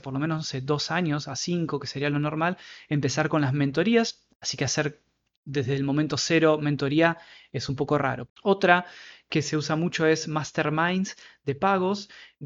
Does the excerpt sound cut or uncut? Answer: cut